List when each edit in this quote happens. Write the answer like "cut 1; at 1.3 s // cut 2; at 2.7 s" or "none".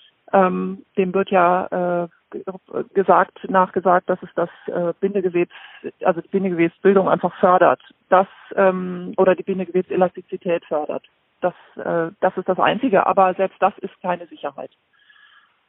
none